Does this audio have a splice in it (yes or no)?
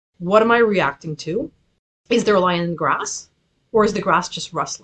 no